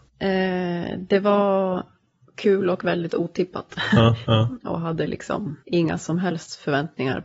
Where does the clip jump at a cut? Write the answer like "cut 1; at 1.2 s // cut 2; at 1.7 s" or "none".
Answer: cut 1; at 4.3 s // cut 2; at 5.6 s